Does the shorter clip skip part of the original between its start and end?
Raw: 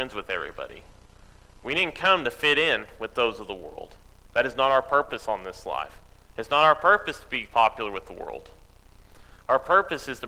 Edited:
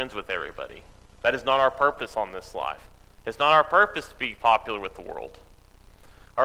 yes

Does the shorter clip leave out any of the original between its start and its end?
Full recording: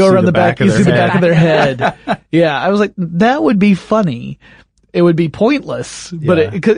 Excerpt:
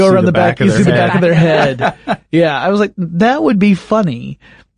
no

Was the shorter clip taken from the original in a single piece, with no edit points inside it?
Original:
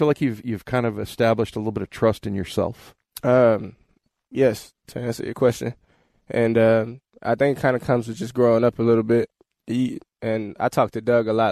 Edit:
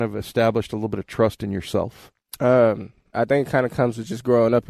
no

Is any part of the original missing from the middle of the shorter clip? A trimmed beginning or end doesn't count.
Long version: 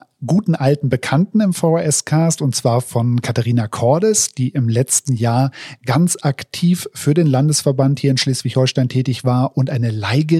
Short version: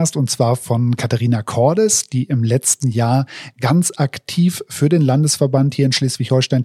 no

